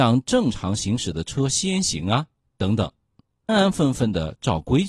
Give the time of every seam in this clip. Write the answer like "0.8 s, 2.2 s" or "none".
3.5 s